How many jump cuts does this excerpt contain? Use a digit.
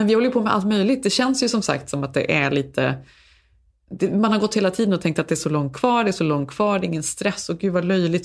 0